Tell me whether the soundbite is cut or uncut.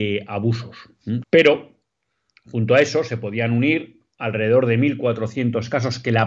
cut